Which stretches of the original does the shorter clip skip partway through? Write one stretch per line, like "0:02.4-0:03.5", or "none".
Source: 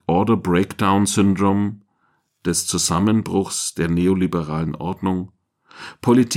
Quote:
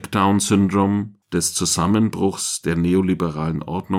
0:01.9-0:02.3